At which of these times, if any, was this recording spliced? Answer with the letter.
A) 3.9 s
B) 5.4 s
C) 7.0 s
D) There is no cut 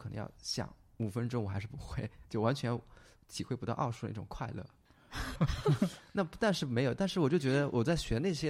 B